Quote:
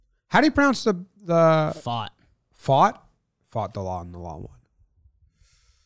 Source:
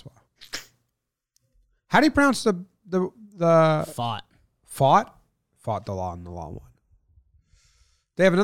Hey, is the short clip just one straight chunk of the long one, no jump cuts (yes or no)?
no